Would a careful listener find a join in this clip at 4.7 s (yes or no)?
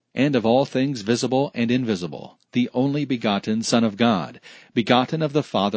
no